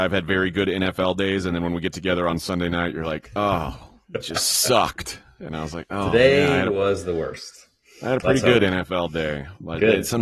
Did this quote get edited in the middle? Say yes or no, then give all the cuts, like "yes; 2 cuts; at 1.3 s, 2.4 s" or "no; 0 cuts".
no; 0 cuts